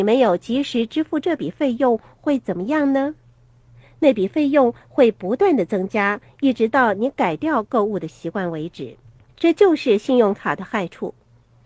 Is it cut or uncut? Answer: uncut